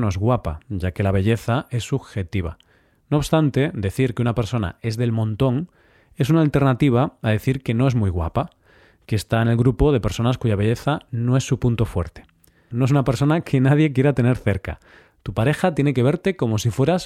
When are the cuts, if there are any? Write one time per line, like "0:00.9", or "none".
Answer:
0:12.7

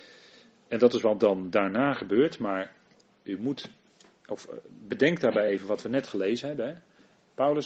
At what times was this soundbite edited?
none

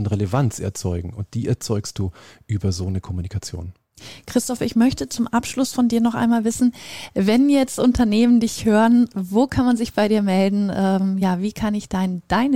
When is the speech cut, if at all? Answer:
none

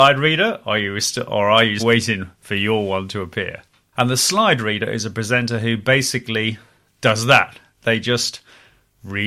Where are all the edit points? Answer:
0:01.8
0:03.9

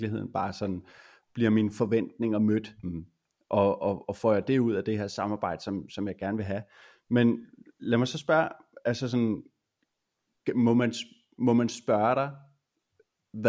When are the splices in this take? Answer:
0:02.8

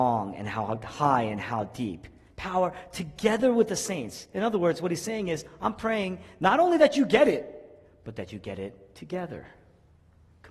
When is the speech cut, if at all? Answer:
none

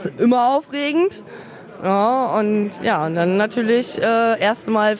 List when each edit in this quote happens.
none

